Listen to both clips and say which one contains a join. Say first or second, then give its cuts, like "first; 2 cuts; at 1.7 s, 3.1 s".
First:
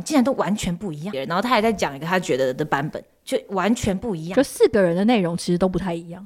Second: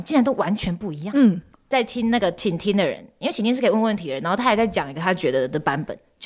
first; 1 cut; at 1.1 s